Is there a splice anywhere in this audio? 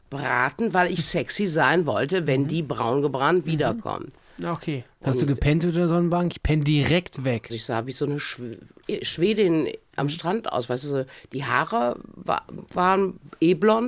yes; 2 cuts; at 4.4 s, 7.5 s

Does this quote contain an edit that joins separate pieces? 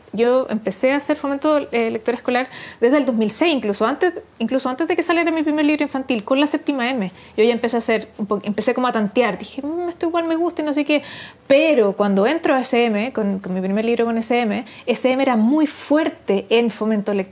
no; 0 cuts

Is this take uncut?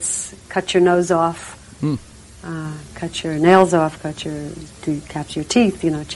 yes; 0 cuts

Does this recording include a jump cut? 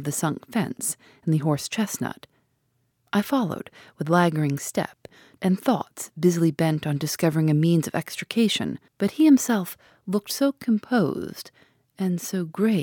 yes; 2 cuts; at 3.1 s, 8.9 s

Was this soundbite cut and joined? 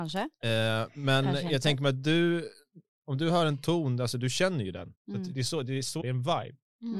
yes; 2 cuts; at 4.9 s, 6.0 s

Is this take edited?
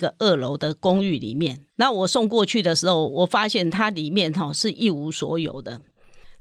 yes; 2 cuts; at 1.7 s, 3.1 s

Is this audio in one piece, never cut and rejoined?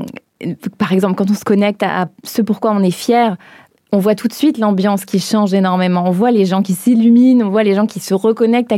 yes; 0 cuts

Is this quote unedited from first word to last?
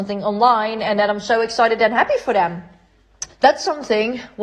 no; 1 cut; at 3.3 s

